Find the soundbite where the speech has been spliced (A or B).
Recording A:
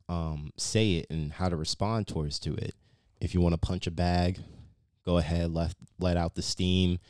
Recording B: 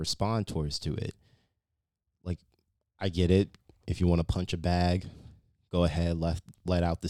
A